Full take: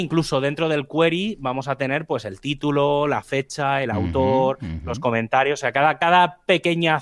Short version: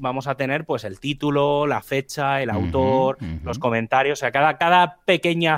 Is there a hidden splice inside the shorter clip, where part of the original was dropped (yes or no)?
no